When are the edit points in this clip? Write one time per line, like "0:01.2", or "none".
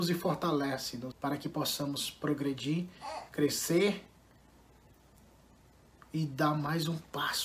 0:01.1